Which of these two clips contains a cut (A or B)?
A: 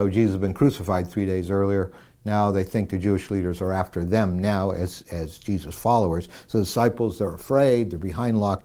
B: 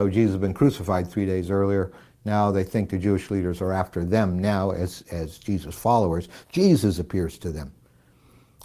B